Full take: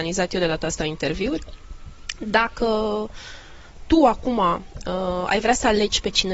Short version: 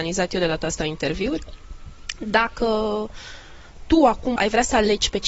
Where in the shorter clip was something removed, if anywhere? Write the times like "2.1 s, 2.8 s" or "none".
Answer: 4.4 s